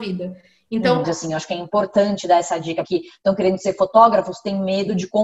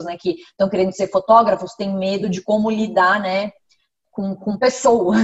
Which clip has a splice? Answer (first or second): first